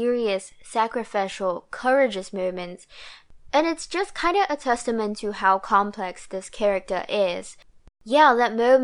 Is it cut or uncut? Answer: cut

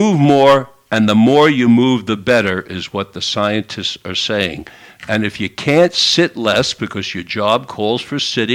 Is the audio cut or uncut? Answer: uncut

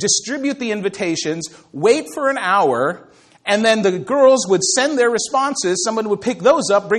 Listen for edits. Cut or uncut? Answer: uncut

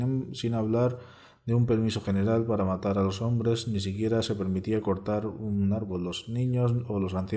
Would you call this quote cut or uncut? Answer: uncut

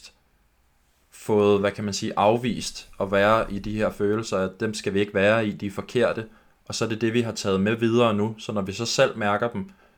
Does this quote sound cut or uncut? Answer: uncut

